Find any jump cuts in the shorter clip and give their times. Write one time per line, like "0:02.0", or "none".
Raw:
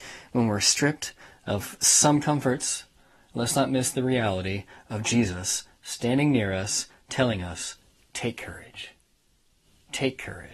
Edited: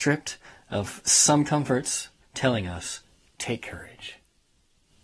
0:02.2